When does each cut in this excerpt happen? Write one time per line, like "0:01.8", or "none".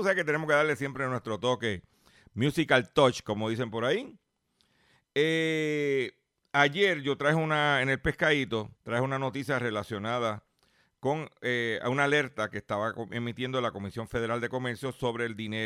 0:08.8

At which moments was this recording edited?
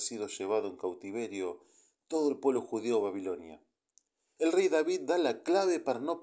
0:04.4

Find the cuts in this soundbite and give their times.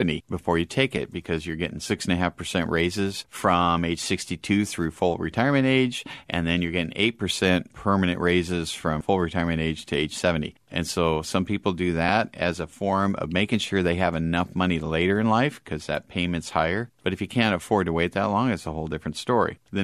none

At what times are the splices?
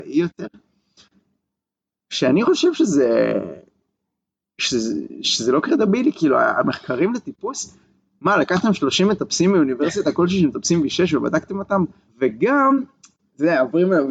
0:12.1

